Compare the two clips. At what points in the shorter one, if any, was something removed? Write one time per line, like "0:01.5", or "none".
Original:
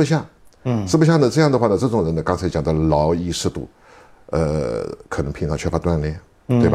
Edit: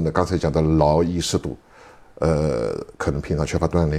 none